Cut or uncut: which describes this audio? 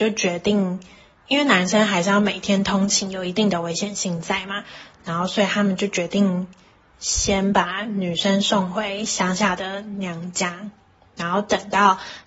uncut